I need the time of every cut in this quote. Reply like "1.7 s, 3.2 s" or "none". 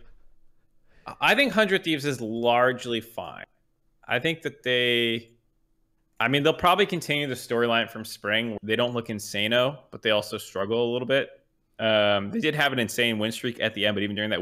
8.6 s

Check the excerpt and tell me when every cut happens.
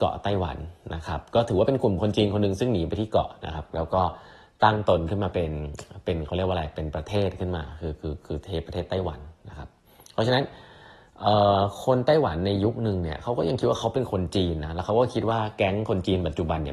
none

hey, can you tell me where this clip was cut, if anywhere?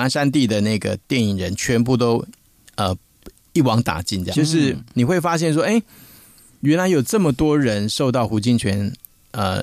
4.3 s

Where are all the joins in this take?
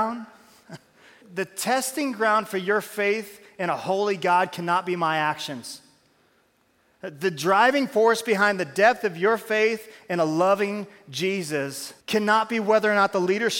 1.2 s, 12.0 s

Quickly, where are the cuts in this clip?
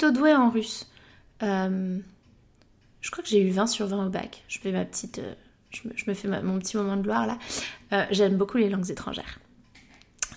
none

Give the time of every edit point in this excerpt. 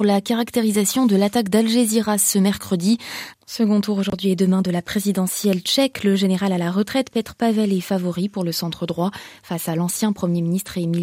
3.3 s

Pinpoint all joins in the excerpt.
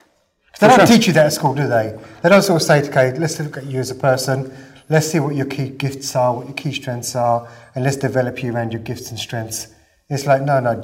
none

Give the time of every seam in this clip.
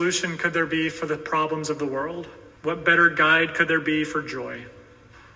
2.6 s

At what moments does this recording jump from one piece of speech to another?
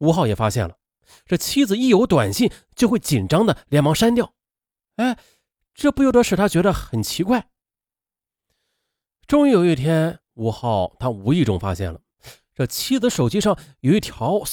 none

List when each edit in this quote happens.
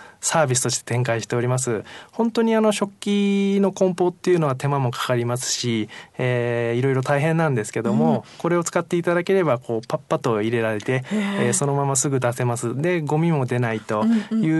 none

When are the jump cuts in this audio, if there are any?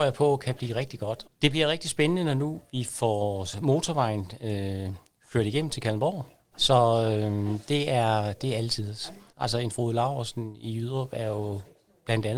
1.2 s, 6.5 s, 9.3 s

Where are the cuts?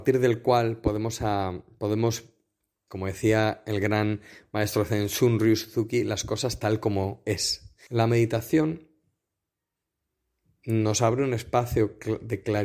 2.9 s, 7.9 s

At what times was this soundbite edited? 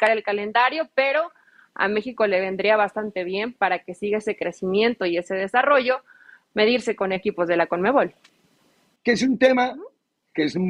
9.0 s

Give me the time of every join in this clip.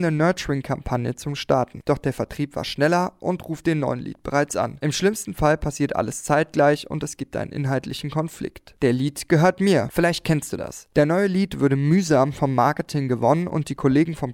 8.8 s

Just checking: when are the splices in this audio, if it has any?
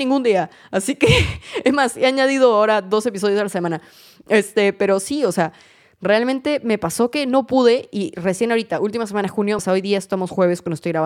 9.6 s

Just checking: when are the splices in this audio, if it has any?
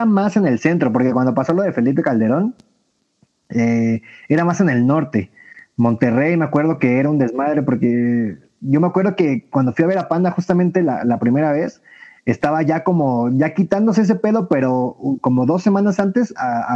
none

